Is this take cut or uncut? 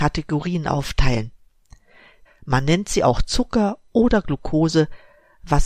cut